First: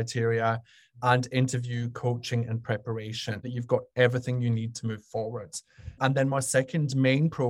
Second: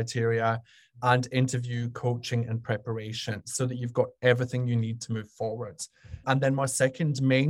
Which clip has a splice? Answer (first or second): first